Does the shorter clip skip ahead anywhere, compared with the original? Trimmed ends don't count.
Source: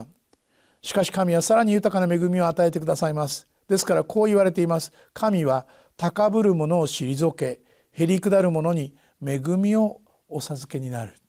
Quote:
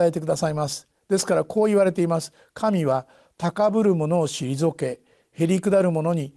no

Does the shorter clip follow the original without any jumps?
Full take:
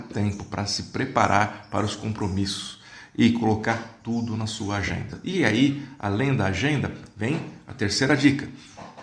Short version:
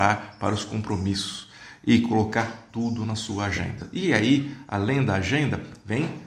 yes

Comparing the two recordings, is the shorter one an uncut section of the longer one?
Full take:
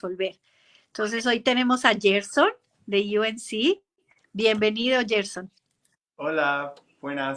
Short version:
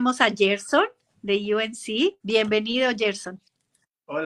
no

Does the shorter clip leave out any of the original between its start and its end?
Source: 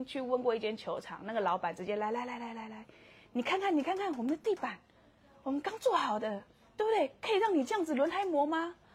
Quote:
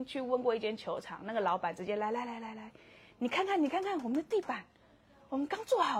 yes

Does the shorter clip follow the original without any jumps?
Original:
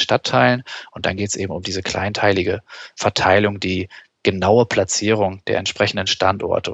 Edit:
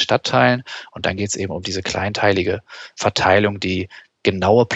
yes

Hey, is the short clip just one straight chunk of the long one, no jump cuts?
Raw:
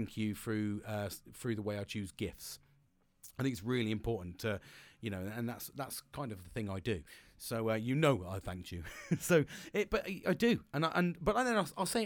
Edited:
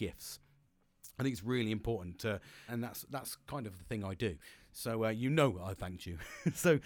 no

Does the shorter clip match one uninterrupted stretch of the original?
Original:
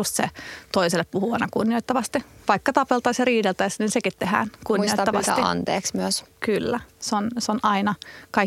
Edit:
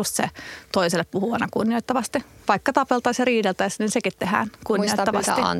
yes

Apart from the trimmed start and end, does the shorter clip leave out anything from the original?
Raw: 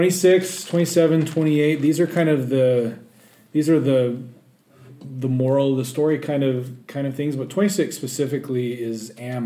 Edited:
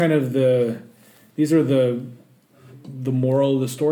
no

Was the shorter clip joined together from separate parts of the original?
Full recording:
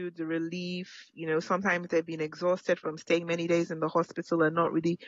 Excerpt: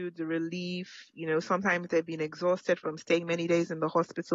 no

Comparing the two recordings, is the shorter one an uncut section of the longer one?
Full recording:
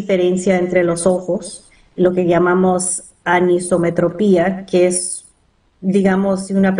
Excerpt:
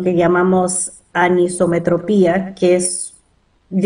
yes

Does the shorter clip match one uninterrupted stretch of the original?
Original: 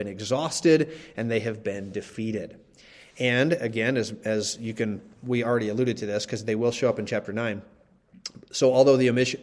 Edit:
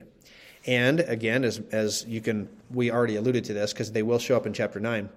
yes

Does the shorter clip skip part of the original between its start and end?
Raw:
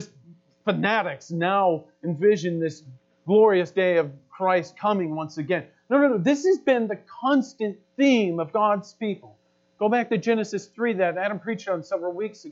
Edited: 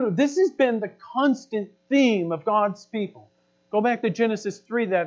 no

